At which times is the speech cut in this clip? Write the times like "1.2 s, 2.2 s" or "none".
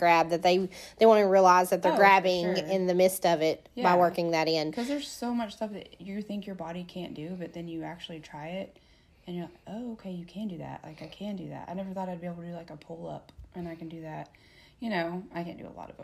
11.7 s